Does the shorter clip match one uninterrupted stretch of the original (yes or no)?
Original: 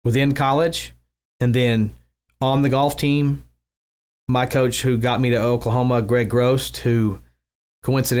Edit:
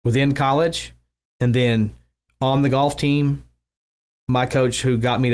yes